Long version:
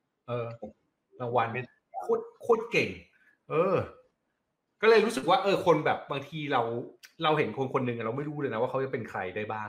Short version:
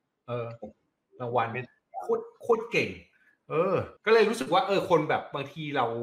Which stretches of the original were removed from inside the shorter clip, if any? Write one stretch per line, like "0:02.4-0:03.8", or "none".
0:04.0-0:04.7